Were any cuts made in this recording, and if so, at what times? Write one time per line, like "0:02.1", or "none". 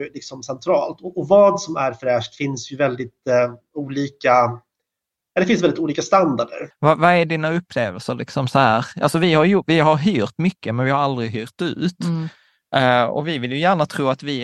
0:06.7